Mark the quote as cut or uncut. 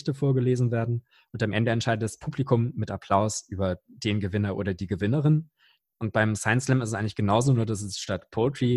uncut